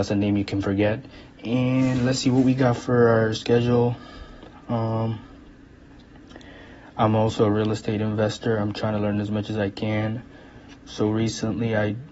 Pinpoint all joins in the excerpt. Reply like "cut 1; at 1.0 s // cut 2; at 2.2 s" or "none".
cut 1; at 1.3 s